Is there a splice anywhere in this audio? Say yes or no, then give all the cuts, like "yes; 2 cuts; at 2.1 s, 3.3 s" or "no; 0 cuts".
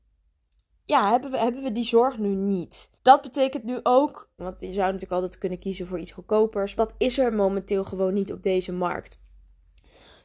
yes; 3 cuts; at 2.9 s, 4.4 s, 6.8 s